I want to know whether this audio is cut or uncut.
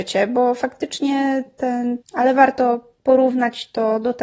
cut